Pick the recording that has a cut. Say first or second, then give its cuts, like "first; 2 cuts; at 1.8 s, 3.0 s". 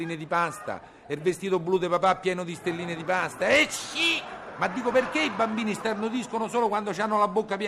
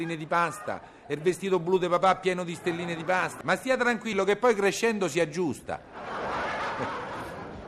second; 1 cut; at 3.4 s